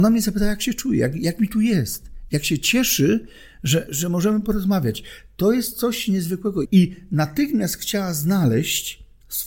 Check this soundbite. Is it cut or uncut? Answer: cut